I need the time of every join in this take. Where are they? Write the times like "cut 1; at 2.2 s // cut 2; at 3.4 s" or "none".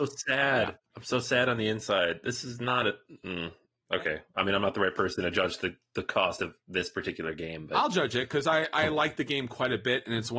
none